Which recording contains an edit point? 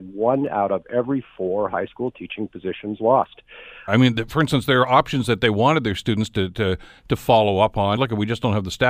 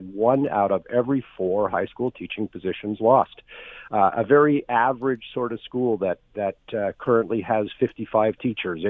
first; 2 cuts; at 3.9 s, 8.0 s

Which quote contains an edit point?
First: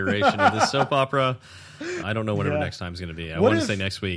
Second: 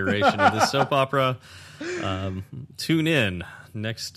first; 1 cut; at 2.0 s

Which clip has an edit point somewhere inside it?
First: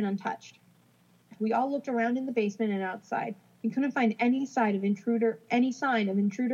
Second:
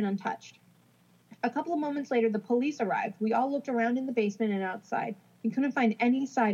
first; 1 cut; at 1.4 s

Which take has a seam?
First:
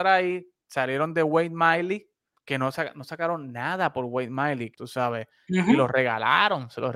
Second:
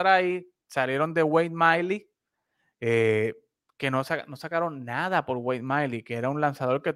first; 2 cuts; at 2.3 s, 4.7 s

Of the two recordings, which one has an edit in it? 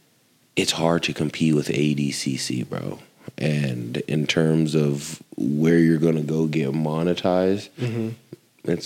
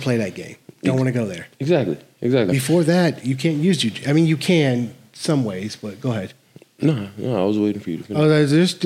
second; 1 cut; at 2.5 s

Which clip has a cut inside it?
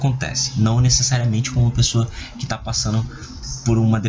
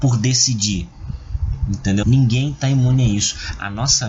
second; 1 cut; at 2.0 s

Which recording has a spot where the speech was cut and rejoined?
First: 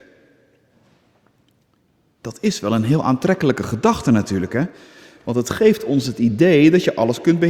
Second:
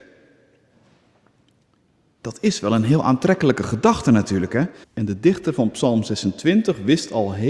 second; 1 cut; at 4.8 s

